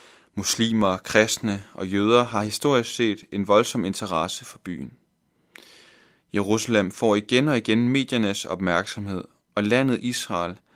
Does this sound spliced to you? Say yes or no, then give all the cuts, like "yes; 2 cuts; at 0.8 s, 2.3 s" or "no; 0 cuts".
no; 0 cuts